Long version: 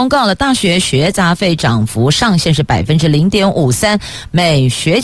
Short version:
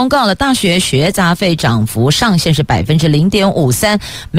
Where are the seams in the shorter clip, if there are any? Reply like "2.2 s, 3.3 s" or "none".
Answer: none